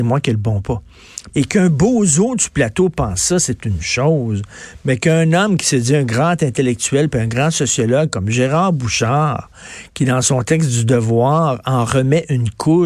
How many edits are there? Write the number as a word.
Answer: one